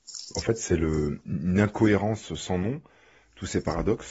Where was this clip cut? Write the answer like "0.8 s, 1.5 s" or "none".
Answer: 1.3 s